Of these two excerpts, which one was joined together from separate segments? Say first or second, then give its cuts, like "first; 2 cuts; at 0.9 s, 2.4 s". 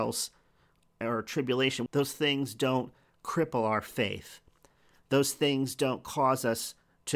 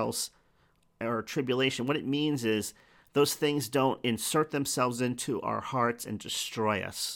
first; 1 cut; at 1.9 s